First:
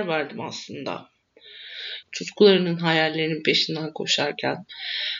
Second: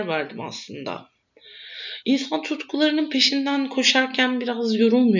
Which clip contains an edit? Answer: first; 1 cut; at 2.0 s

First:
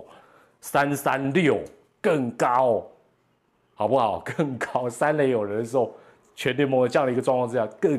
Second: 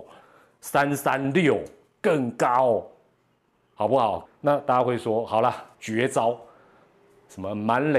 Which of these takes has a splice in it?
second; 2 cuts; at 4.3 s, 5.7 s

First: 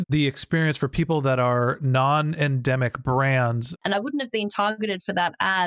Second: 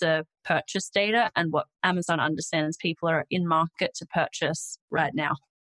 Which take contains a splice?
first; 1 cut; at 3.8 s

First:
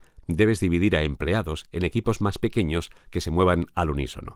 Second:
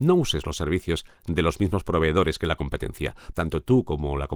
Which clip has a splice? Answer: second; 1 cut; at 3.3 s

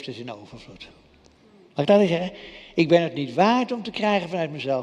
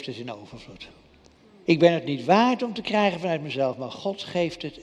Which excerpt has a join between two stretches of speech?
second; 1 cut; at 1.7 s

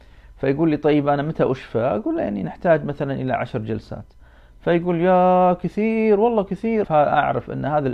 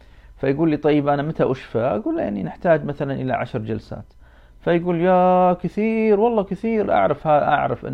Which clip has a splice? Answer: first; 1 cut; at 6.8 s

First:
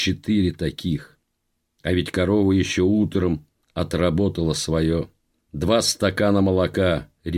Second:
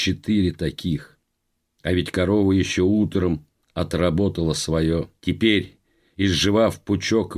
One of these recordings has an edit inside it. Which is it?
second; 1 cut; at 5.2 s

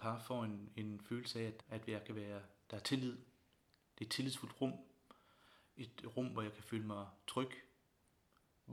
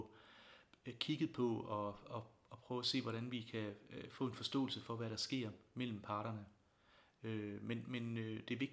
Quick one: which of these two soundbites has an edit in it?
first; 1 cut; at 1.6 s

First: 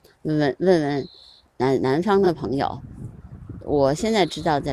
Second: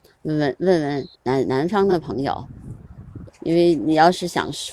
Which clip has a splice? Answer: second; 2 cuts; at 1.1 s, 3.3 s

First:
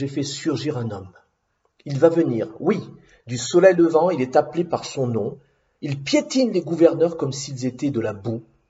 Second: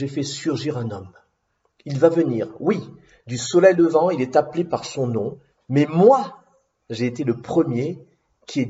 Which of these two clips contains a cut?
second; 1 cut; at 5.5 s

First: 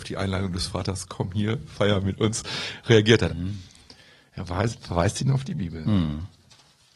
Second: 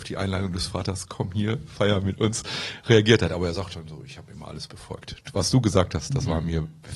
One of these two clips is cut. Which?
first; 1 cut; at 3.3 s

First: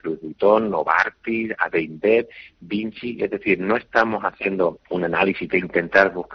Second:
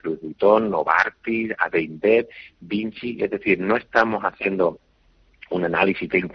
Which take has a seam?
first; 1 cut; at 4.8 s

